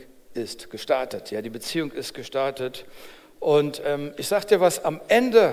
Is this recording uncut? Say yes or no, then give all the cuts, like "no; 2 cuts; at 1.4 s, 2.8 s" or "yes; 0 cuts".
yes; 0 cuts